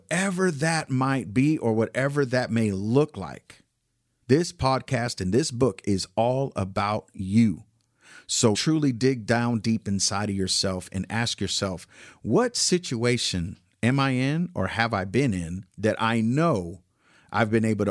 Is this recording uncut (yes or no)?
no